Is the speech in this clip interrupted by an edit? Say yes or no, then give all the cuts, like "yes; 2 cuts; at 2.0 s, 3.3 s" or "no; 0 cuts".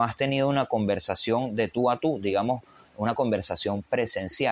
no; 0 cuts